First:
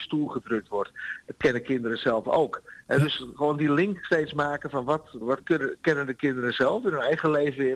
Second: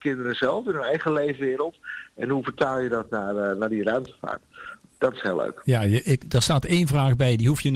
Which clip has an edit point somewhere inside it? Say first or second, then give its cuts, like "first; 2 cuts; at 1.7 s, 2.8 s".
first; 1 cut; at 5.2 s